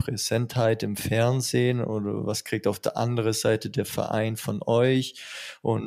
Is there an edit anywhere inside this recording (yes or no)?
no